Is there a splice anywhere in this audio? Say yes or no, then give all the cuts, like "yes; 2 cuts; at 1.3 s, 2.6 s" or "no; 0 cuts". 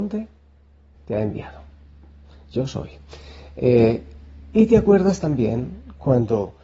yes; 1 cut; at 0.9 s